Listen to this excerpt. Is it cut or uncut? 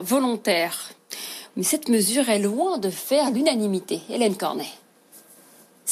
cut